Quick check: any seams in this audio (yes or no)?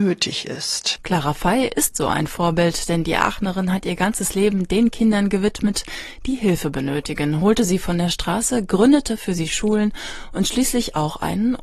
yes